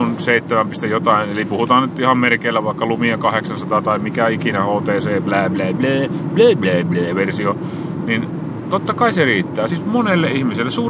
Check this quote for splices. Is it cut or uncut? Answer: uncut